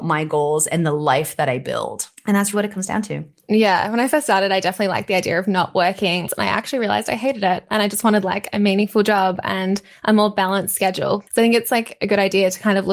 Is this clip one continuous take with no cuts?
no; 3 cuts; at 2.5 s, 6.3 s, 11.3 s

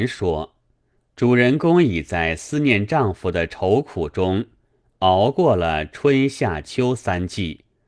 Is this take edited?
no; 0 cuts

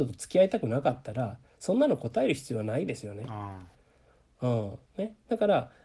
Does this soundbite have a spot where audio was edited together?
no; 0 cuts

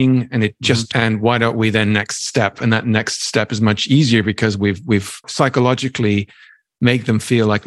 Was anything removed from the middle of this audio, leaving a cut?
yes; 2 cuts; at 0.9 s, 5.2 s

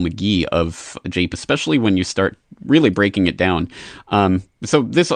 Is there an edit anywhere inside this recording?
yes; 1 cut; at 1.3 s

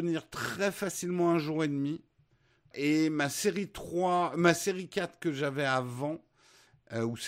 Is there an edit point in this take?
yes; 1 cut; at 2.7 s

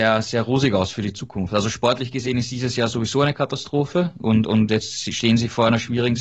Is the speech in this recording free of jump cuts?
yes; 0 cuts

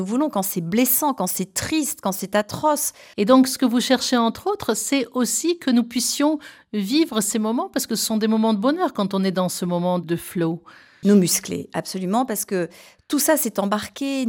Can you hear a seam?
yes; 2 cuts; at 3.1 s, 11.0 s

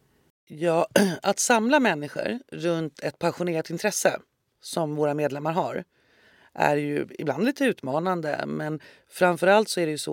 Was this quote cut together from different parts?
no; 0 cuts

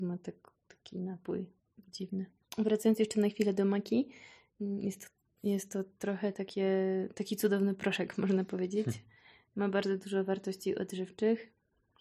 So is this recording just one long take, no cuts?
yes; 0 cuts

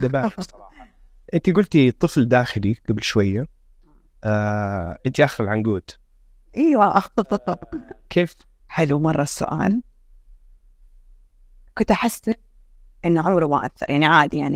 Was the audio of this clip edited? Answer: yes; 1 cut; at 8.6 s

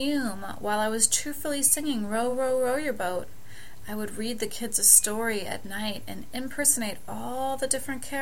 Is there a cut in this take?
no; 0 cuts

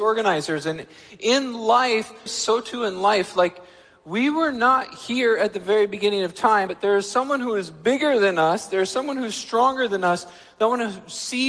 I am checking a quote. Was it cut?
yes; 2 cuts; at 2.3 s, 6.7 s

